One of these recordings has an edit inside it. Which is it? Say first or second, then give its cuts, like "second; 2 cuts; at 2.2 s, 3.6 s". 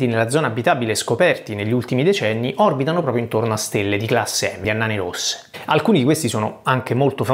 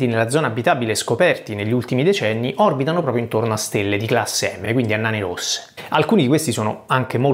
first; 1 cut; at 4.6 s